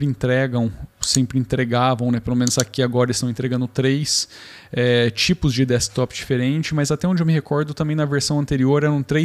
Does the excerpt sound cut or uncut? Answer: uncut